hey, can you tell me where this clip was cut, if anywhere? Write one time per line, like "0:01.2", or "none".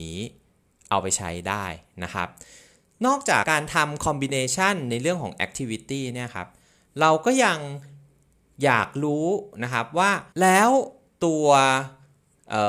0:03.4
0:10.3